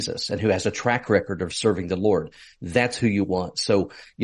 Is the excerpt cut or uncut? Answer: uncut